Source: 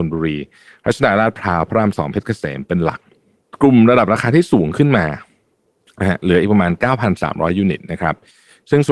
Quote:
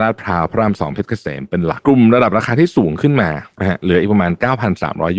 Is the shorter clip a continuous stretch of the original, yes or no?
no